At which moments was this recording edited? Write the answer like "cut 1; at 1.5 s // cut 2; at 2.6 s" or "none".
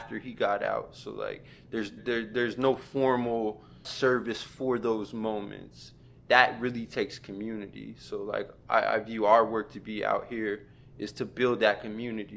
cut 1; at 2.0 s